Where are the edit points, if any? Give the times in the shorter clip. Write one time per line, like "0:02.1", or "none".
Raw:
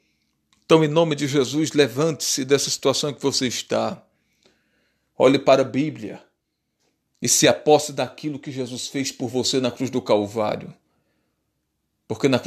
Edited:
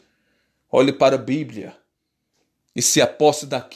none